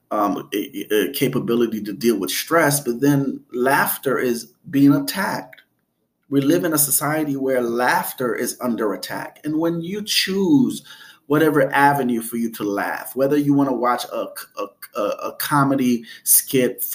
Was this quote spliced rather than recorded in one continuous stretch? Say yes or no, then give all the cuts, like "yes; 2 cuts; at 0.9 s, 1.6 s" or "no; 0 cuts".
no; 0 cuts